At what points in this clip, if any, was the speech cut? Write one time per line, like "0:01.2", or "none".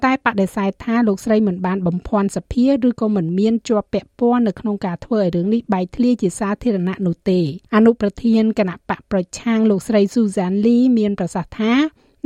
0:07.6